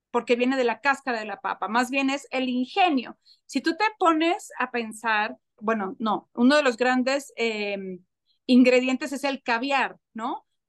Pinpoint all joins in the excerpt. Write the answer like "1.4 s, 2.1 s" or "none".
5.6 s